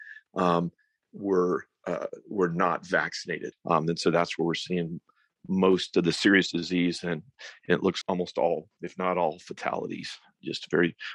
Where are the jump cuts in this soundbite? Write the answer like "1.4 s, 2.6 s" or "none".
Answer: 3.5 s, 8.0 s